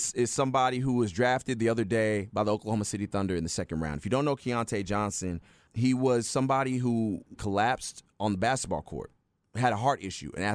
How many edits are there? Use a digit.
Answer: 2